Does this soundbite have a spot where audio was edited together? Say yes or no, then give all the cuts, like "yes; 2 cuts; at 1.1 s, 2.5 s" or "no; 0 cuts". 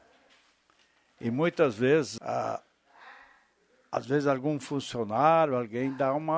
yes; 1 cut; at 2.2 s